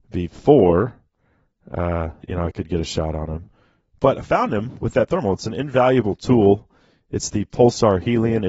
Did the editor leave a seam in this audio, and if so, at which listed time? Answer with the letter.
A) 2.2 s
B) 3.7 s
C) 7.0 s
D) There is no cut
A